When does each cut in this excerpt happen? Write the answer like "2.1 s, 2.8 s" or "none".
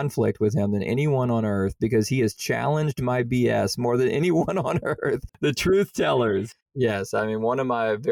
5.3 s, 6.6 s